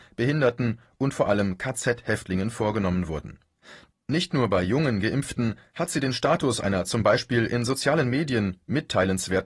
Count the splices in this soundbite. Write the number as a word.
one